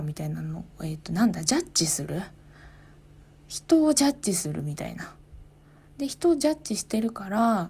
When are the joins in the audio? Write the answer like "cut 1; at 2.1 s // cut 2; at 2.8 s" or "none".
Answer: none